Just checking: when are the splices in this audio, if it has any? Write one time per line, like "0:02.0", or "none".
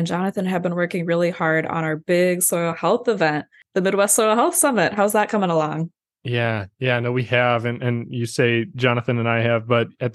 none